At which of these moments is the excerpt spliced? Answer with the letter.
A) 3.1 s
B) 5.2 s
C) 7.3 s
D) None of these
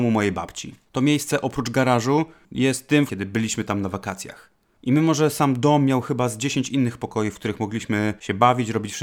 A